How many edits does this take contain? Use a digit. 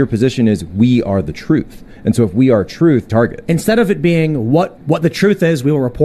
2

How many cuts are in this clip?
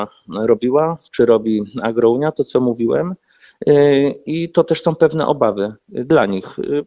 0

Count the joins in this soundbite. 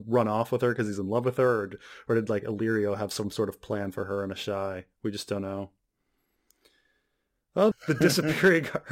1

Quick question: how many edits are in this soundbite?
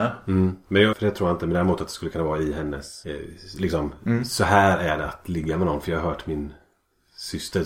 1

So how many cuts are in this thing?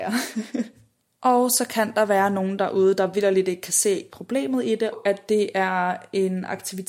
1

